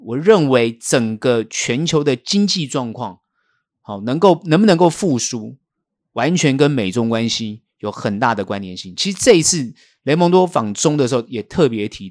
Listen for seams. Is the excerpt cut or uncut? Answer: uncut